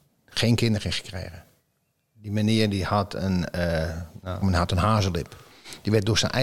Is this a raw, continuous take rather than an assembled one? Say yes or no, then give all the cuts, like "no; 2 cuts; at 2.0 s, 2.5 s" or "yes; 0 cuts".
no; 1 cut; at 4.4 s